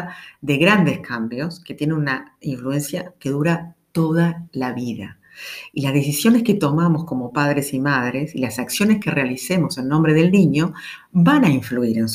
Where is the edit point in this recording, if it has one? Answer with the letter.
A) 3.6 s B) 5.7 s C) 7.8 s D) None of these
D